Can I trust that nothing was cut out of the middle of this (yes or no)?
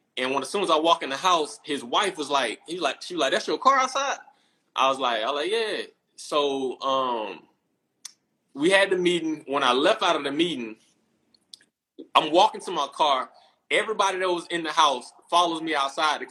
yes